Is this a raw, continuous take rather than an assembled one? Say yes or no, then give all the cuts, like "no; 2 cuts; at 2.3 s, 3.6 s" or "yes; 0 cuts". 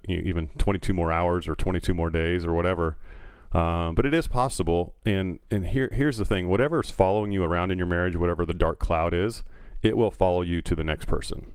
yes; 0 cuts